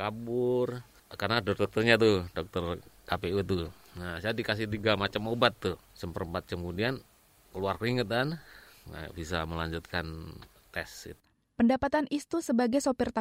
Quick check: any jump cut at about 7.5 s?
no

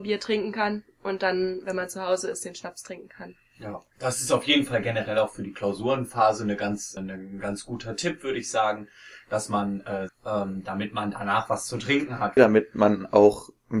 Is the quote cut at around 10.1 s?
yes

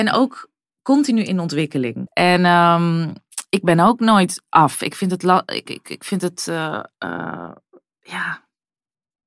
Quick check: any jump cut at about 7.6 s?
no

